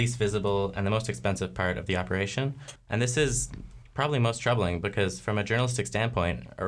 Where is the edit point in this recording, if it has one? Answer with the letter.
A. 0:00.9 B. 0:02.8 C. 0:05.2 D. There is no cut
B